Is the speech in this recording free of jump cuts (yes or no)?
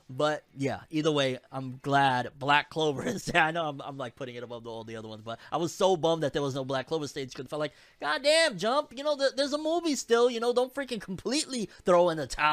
no